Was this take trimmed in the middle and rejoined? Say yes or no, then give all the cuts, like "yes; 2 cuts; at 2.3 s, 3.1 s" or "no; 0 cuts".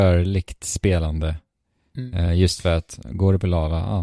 no; 0 cuts